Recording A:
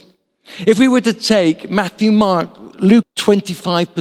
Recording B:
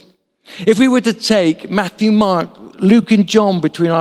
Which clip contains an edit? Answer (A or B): A